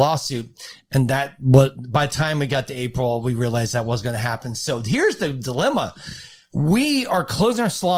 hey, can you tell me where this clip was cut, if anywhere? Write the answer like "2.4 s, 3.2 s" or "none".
none